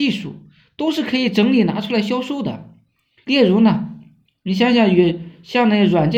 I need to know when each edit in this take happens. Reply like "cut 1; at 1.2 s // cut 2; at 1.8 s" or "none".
cut 1; at 3.2 s